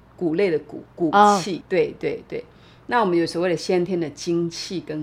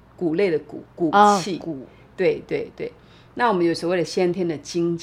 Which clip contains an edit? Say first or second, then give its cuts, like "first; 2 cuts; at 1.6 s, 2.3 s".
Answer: first; 1 cut; at 1.6 s